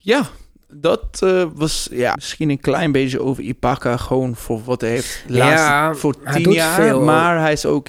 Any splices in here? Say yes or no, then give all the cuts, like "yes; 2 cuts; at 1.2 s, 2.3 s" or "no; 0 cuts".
yes; 1 cut; at 2.2 s